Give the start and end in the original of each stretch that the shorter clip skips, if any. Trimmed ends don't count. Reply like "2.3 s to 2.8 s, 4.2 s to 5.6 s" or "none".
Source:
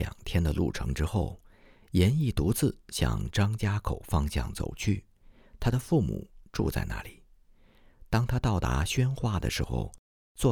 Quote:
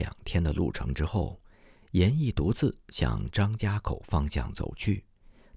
none